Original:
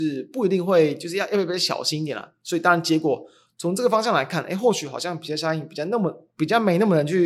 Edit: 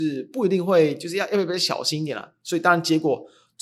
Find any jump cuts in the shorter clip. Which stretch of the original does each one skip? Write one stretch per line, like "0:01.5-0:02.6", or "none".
none